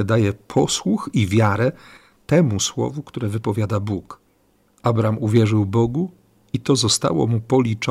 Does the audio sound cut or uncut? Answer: cut